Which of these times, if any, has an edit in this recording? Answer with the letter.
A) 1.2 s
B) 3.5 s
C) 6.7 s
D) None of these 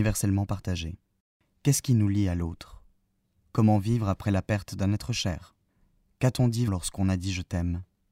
C